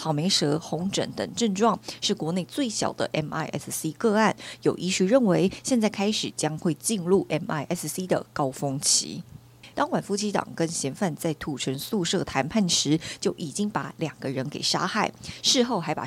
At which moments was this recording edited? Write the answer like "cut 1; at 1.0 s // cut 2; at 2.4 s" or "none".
cut 1; at 9.7 s